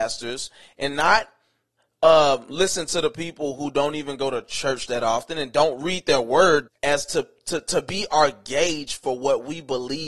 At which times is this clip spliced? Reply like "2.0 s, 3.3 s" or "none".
6.7 s